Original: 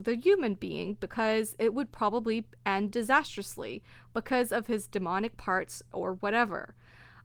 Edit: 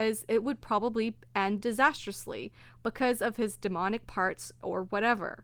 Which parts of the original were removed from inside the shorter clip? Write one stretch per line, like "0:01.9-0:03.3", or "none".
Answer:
none